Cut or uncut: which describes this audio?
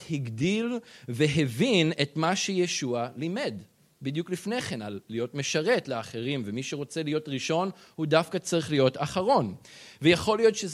uncut